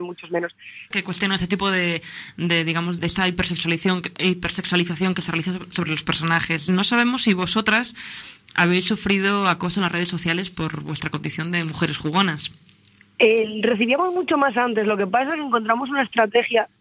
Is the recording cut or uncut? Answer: cut